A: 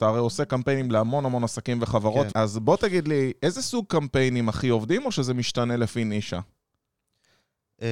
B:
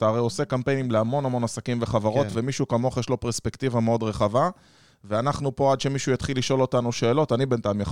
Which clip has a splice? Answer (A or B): A